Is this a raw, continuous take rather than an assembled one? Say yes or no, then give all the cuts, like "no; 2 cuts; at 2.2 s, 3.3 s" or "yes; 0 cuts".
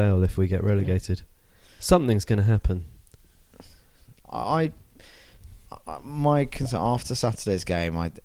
yes; 0 cuts